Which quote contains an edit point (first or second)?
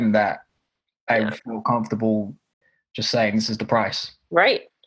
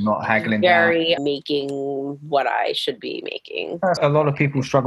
second